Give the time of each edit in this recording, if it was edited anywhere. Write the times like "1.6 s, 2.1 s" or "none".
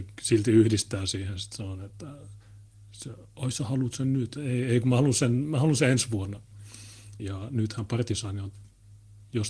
4.4 s, 7.2 s